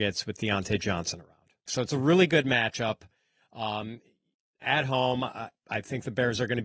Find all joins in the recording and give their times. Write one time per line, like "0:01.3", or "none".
0:01.7